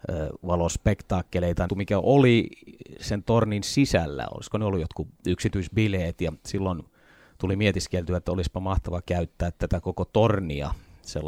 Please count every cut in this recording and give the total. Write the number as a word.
one